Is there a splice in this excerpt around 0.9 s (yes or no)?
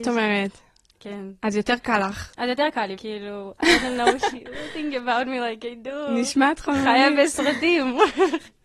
no